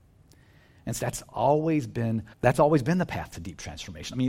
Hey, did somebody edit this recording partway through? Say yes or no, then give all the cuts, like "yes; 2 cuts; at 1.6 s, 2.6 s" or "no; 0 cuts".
yes; 2 cuts; at 1.0 s, 2.3 s